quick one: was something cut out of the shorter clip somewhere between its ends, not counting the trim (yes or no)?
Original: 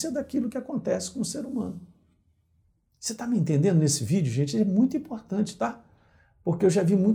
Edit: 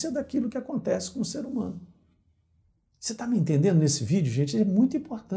no